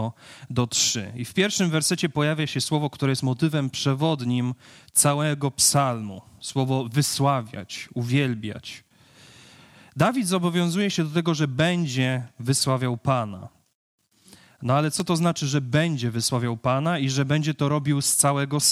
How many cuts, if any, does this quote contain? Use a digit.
0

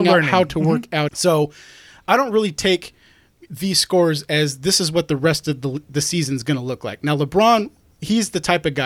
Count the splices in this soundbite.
1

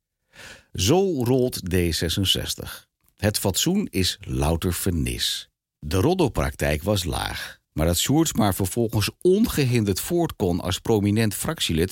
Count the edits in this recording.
1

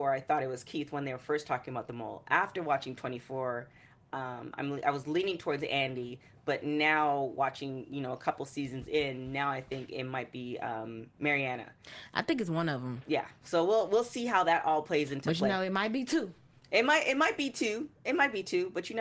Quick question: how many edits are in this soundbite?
0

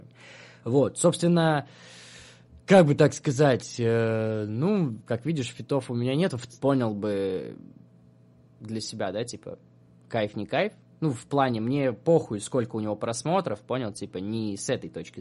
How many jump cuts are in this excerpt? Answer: 2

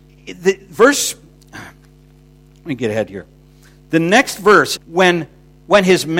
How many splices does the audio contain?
1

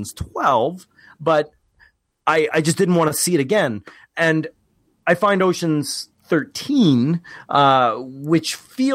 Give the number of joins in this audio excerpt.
2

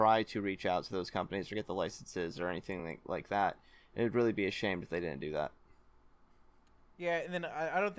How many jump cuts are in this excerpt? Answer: 0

